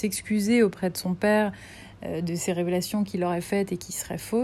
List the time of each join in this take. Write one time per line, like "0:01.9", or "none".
none